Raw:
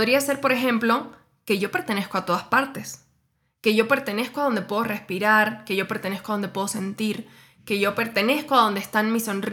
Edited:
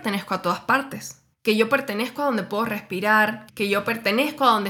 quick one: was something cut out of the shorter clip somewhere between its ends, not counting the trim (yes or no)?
yes